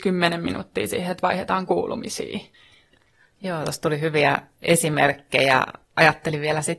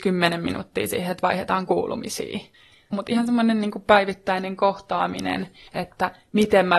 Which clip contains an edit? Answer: second; 1 cut; at 2.9 s

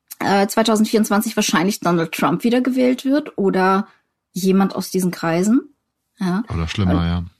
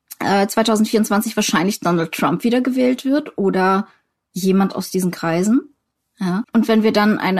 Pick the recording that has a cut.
second; 1 cut; at 6.4 s

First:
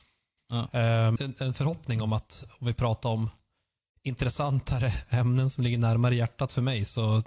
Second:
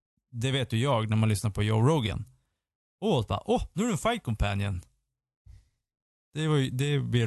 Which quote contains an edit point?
first; 1 cut; at 1.2 s

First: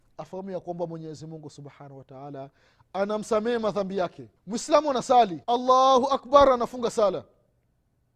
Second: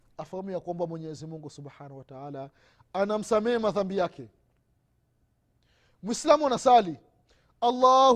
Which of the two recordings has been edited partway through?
first; 2 cuts; at 4.4 s, 5.4 s

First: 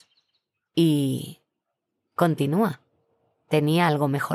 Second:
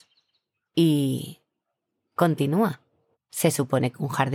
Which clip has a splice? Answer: second; 1 cut; at 3.1 s

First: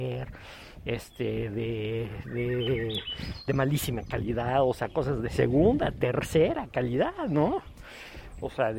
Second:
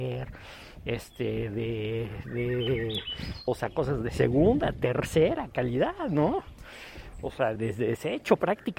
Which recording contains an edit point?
second; 2 cuts; at 3.5 s, 7.6 s

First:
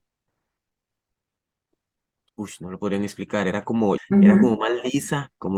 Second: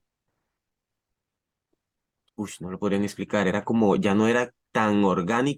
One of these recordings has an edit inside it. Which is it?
first; 1 cut; at 4.0 s

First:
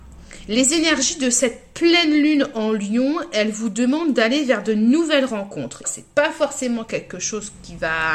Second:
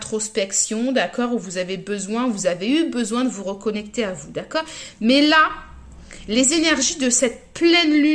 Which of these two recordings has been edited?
first; 1 cut; at 5.8 s

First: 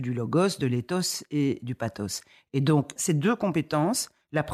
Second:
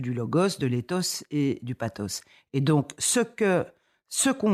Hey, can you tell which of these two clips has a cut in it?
first; 1 cut; at 3.0 s

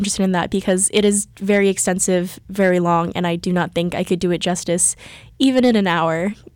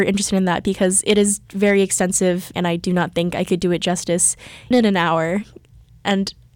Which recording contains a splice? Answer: second; 2 cuts; at 2.5 s, 4.7 s

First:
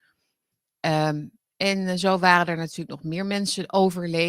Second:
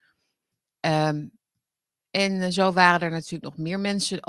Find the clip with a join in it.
first; 1 cut; at 1.4 s

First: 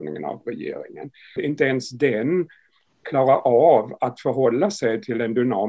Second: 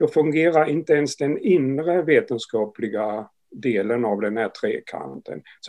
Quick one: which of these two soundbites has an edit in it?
first; 1 cut; at 1.4 s

